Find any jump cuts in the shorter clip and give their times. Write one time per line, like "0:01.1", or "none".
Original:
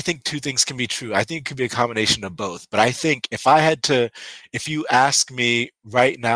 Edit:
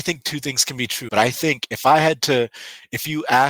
0:01.1